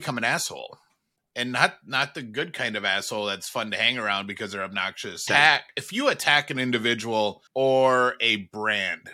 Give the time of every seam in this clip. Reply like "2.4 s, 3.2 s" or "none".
5.3 s, 7.5 s